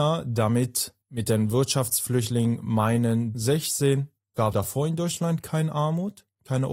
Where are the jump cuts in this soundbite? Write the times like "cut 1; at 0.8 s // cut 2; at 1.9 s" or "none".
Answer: cut 1; at 3.3 s // cut 2; at 4.5 s